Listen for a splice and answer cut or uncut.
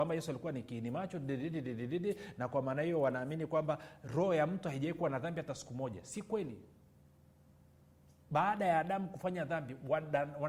uncut